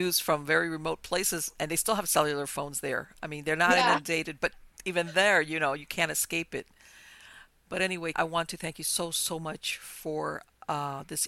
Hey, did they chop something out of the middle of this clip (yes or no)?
yes